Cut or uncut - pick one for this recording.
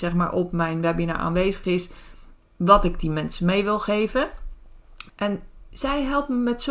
cut